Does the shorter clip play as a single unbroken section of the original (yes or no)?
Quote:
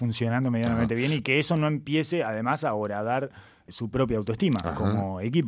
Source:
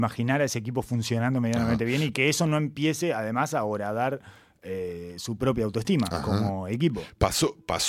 no